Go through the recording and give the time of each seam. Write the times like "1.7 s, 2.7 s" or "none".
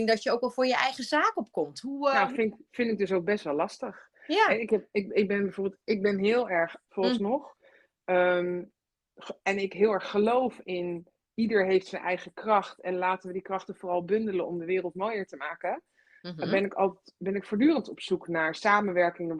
6.9 s